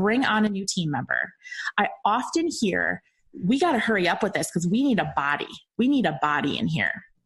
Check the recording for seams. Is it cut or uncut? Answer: cut